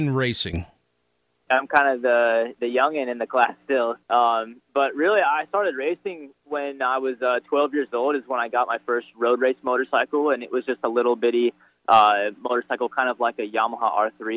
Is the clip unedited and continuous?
no; 2 cuts; at 1.5 s, 4.0 s

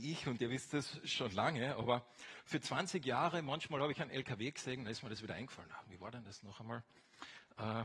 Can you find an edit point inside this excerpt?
yes; 1 cut; at 5.8 s

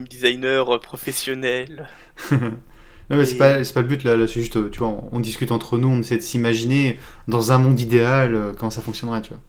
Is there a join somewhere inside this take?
no; 0 cuts

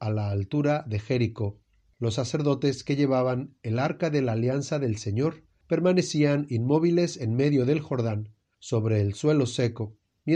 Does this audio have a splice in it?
no; 0 cuts

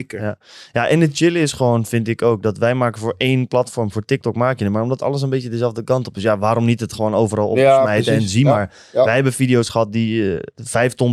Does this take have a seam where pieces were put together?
no; 0 cuts

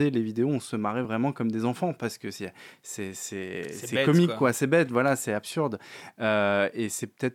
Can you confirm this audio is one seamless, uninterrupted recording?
yes; 0 cuts

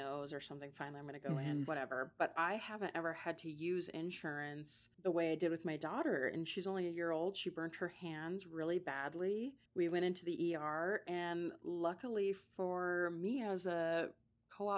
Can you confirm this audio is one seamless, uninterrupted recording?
no; 2 cuts; at 4.9 s, 9.7 s

